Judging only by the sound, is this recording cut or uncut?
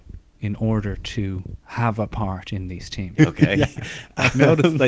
cut